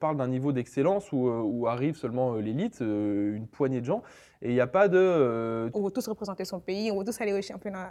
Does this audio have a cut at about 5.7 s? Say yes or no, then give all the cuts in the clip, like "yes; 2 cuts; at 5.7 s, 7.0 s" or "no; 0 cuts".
yes; 1 cut; at 5.7 s